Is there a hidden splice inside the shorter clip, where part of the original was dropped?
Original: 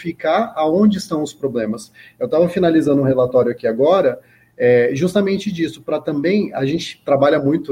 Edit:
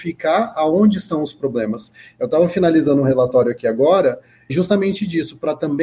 yes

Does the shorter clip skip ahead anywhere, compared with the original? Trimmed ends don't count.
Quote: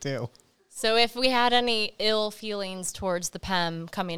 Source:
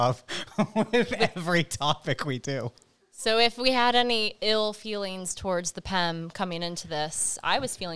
no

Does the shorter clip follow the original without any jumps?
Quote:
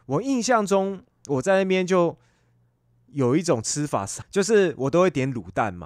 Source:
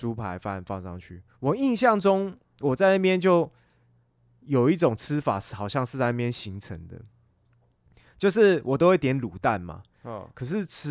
no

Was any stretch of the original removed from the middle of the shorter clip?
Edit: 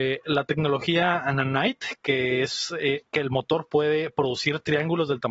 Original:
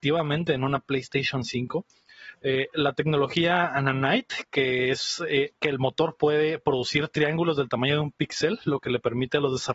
no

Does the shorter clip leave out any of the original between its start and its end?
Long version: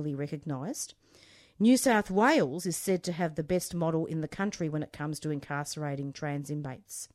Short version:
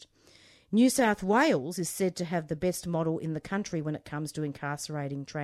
no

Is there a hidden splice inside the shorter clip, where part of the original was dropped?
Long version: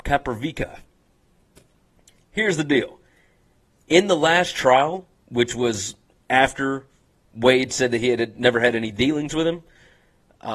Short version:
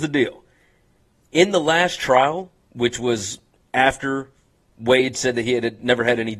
no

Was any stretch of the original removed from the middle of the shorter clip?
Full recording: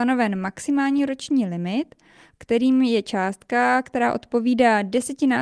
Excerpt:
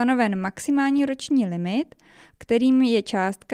no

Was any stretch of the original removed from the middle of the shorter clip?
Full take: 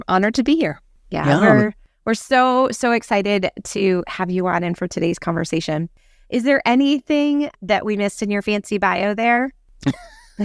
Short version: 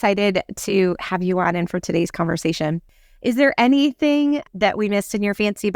no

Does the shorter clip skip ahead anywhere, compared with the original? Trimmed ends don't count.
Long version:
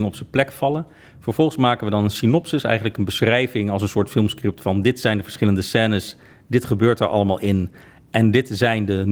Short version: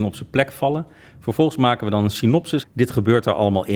yes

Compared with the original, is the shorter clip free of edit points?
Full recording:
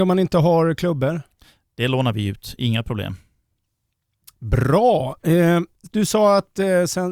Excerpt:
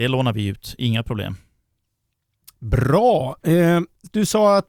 yes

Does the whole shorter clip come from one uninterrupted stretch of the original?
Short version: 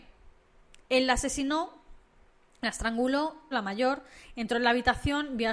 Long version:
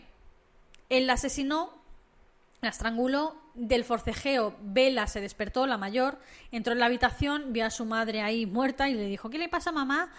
no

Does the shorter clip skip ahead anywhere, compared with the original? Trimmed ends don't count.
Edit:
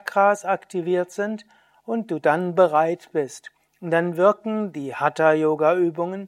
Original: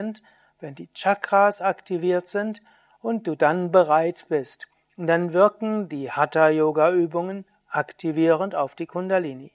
no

